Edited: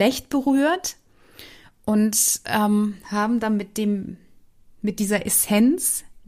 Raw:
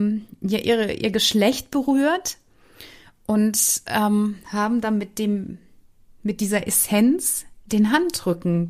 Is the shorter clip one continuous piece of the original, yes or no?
yes